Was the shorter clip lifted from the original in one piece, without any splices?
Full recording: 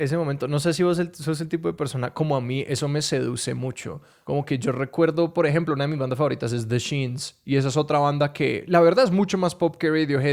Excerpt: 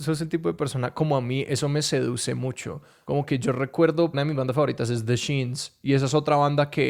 no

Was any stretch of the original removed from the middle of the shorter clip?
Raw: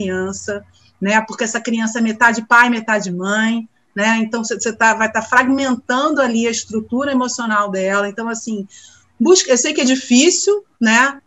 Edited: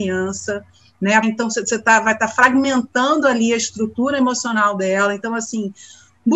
yes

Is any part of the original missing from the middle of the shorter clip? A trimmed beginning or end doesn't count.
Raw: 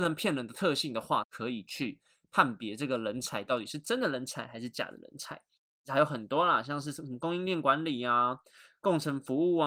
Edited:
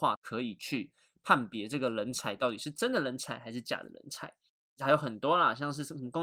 no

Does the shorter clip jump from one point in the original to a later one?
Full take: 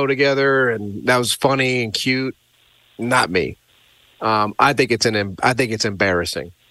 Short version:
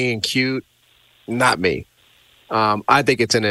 no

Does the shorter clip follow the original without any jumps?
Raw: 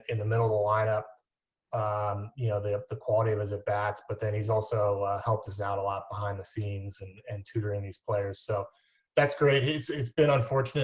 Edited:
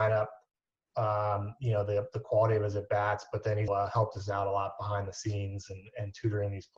no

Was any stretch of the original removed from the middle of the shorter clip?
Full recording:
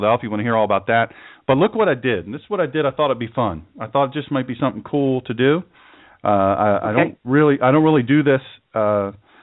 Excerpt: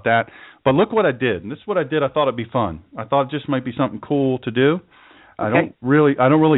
yes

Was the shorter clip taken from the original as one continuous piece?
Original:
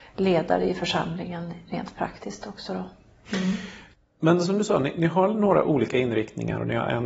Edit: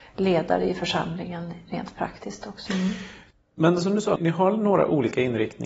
no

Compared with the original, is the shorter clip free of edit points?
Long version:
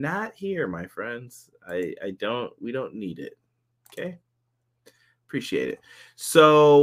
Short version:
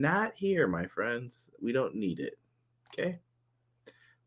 no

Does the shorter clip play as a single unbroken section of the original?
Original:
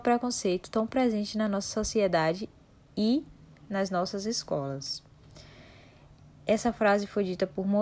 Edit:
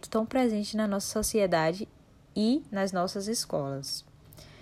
no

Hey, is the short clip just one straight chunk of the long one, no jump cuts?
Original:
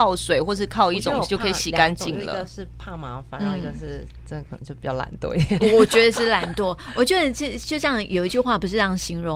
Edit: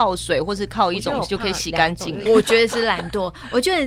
no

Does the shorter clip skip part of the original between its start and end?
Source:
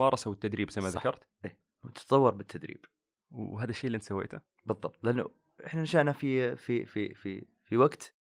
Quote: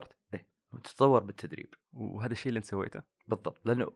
yes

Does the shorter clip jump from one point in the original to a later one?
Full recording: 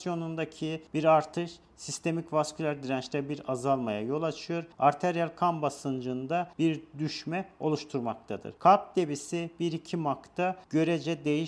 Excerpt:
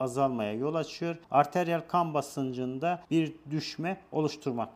no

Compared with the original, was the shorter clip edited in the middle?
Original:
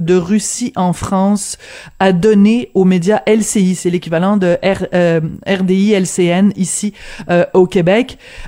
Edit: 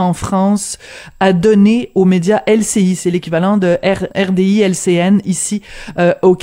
yes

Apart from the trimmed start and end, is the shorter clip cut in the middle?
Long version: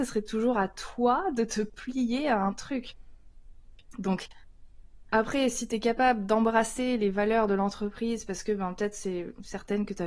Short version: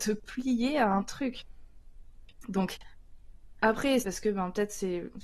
yes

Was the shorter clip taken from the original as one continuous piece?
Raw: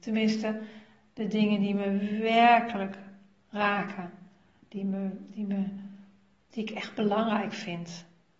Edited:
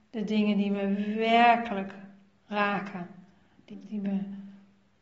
no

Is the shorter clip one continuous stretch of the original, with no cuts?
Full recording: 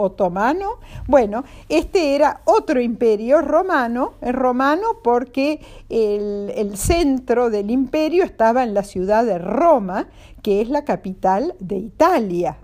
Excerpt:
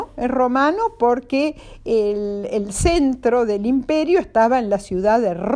yes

